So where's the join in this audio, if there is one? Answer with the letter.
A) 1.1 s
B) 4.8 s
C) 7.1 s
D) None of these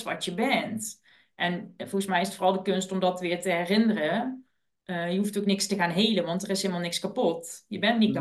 D